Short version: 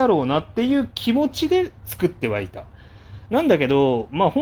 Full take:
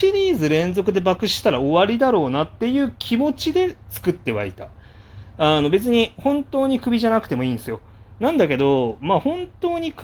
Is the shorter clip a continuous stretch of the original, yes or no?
no